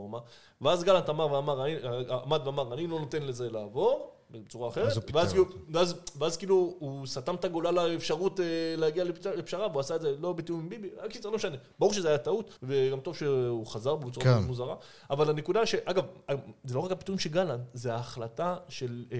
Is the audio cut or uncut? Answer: cut